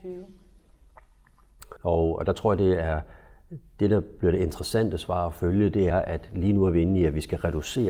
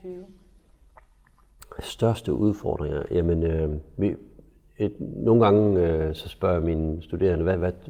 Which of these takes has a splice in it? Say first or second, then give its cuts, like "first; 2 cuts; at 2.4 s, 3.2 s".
first; 2 cuts; at 1.8 s, 5.9 s